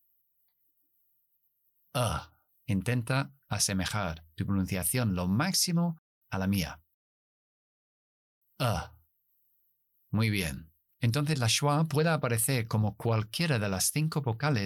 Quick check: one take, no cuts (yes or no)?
yes